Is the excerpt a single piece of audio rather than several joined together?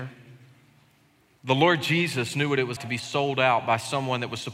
no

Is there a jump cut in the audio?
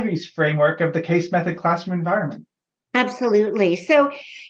no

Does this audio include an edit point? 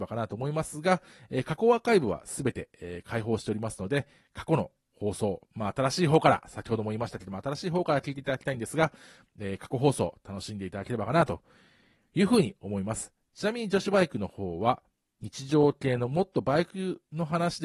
no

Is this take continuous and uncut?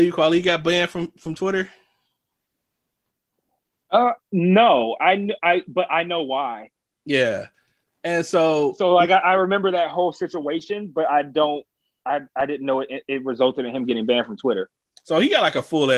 yes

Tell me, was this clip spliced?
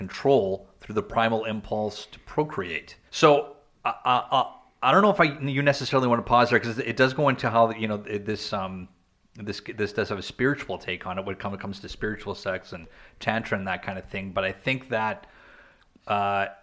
yes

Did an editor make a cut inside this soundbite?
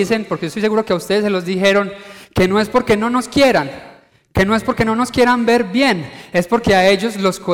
no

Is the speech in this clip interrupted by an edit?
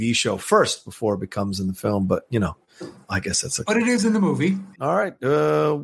yes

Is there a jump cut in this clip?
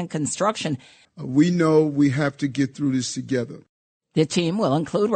yes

